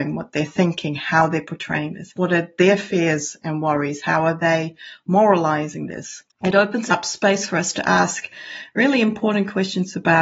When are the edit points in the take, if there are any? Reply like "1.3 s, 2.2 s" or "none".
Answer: 6.3 s